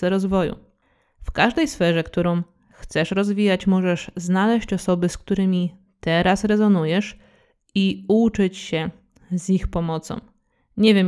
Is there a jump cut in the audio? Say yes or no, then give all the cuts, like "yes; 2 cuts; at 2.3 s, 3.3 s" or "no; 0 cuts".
no; 0 cuts